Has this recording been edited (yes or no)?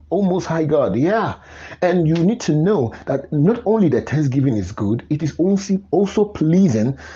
no